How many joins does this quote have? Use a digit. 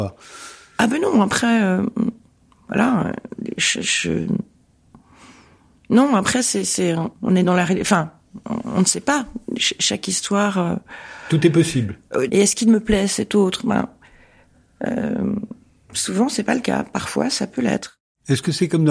2